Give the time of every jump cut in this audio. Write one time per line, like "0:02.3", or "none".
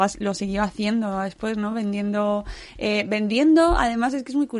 none

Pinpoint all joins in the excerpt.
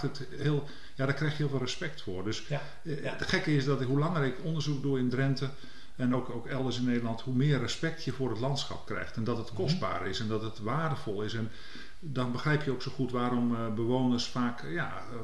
none

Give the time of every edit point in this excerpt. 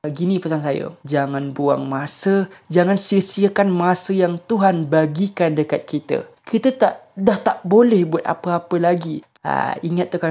0:01.0
0:06.4
0:09.3

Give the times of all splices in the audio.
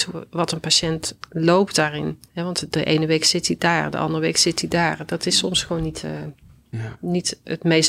0:02.3

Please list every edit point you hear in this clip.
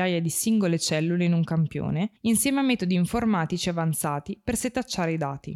0:02.2

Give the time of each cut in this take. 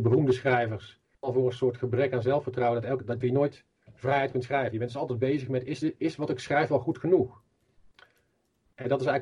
0:01.1
0:03.2

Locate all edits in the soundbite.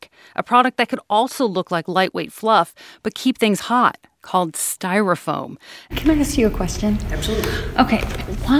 0:05.9

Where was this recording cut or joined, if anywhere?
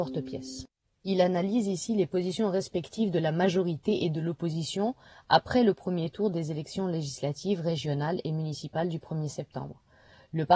none

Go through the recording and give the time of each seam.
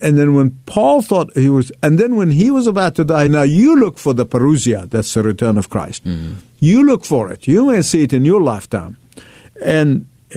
0:03.3

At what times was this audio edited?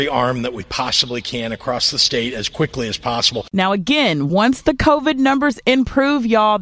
none

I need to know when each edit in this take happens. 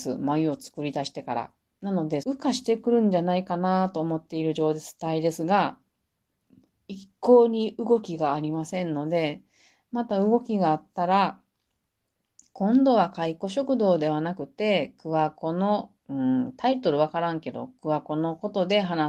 0:02.2
0:16.0

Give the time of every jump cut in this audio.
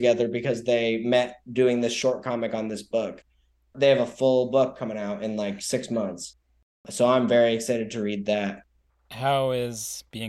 0:08.9

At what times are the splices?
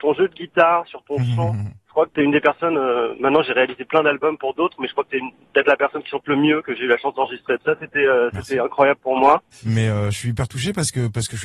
0:07.6
0:09.5

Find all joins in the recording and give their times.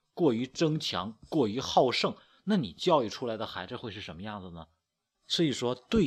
0:05.1

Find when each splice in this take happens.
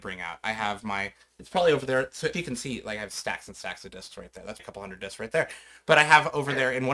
0:02.3
0:04.6

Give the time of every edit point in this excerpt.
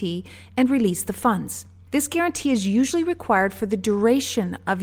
none

